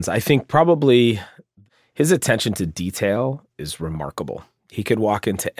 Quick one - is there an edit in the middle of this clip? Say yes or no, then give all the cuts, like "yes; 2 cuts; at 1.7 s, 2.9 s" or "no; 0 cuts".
no; 0 cuts